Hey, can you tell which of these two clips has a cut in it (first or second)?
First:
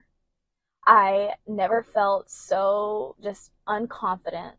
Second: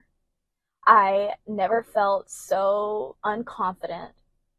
second